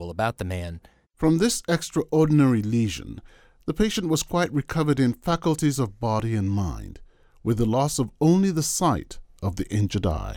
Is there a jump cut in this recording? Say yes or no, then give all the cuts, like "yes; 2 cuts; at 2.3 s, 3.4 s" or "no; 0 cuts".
yes; 1 cut; at 1.0 s